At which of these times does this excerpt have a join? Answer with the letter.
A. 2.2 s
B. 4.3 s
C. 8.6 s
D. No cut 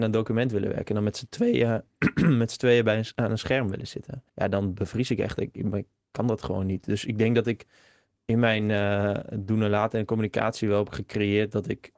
B